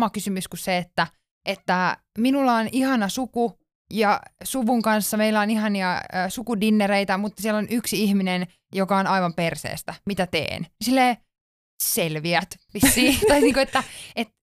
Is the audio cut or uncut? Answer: uncut